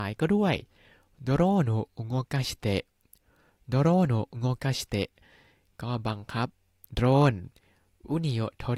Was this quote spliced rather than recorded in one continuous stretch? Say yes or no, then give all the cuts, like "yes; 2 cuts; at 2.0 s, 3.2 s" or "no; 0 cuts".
no; 0 cuts